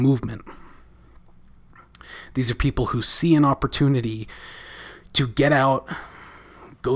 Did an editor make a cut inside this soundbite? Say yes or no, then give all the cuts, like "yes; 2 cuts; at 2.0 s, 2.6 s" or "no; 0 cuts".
no; 0 cuts